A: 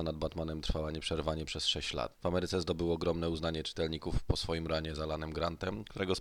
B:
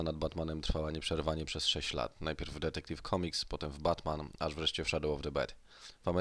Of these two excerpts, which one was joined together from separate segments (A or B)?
A